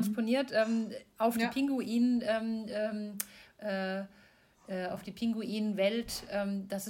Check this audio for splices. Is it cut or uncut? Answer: uncut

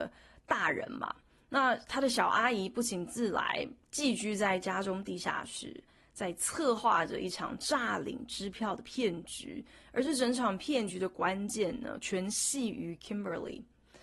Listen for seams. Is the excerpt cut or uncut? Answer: uncut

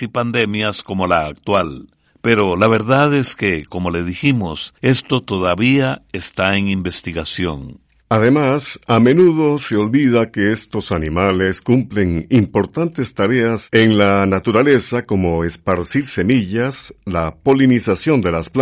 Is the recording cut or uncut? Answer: uncut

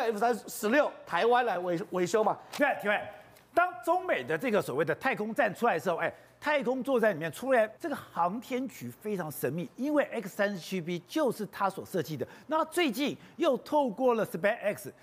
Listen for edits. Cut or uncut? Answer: cut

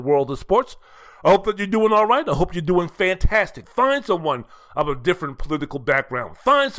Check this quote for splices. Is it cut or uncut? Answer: cut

